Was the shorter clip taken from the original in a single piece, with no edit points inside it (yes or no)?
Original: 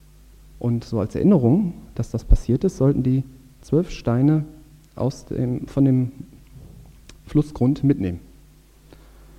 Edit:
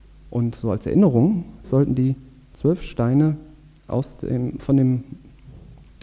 no